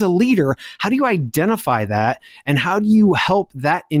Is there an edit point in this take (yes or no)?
no